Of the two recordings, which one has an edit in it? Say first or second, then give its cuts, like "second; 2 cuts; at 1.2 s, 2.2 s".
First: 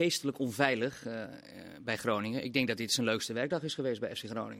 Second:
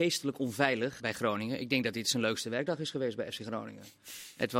second; 1 cut; at 1.0 s